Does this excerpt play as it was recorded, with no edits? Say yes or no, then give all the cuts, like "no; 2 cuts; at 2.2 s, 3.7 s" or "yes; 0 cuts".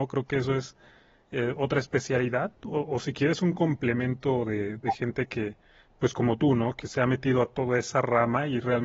yes; 0 cuts